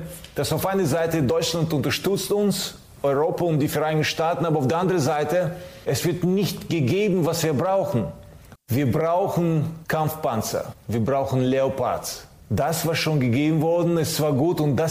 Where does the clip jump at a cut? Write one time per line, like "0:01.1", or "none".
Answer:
0:08.6
0:10.8

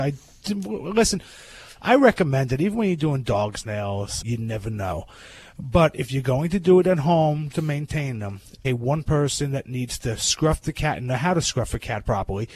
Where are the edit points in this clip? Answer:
0:04.2
0:07.5
0:08.6

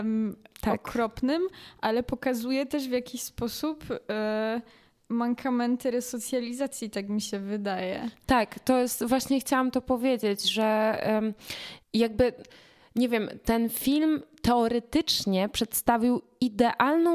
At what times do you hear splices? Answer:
0:11.8

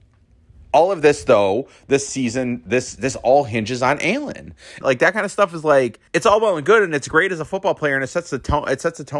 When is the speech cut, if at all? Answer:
0:04.8
0:06.1

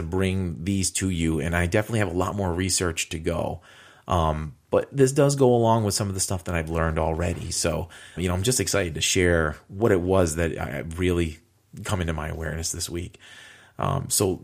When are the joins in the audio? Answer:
0:08.2

